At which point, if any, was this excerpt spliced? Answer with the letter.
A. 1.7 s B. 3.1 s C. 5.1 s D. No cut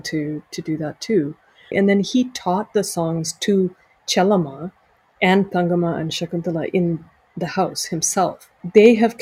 A